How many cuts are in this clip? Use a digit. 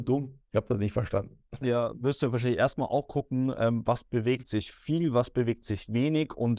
1